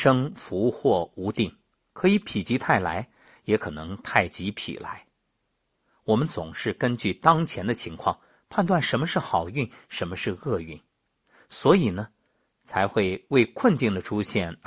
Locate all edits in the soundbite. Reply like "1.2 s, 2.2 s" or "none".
none

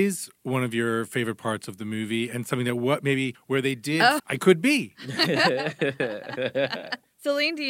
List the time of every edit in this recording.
4.2 s

